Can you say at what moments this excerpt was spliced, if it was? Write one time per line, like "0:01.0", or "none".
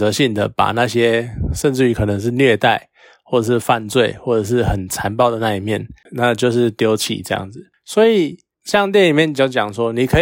0:06.1